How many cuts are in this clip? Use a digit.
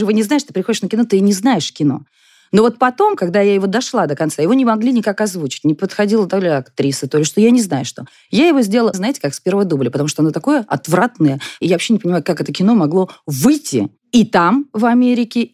2